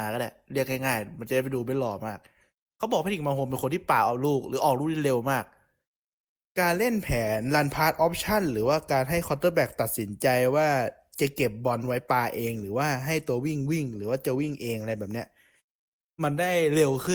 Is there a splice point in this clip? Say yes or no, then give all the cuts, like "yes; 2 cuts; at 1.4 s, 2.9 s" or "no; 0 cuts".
no; 0 cuts